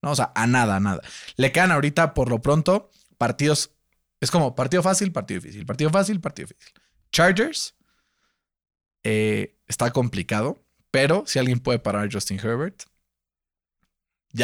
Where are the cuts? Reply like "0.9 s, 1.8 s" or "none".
none